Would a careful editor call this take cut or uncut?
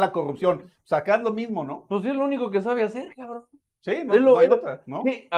uncut